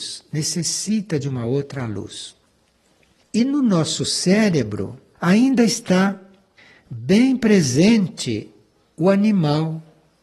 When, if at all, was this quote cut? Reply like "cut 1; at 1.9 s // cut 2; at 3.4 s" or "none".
cut 1; at 3.2 s // cut 2; at 5.2 s